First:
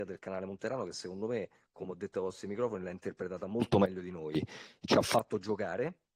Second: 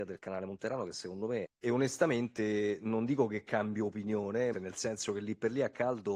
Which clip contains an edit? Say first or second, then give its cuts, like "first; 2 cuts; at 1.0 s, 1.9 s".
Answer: second; 2 cuts; at 1.5 s, 4.5 s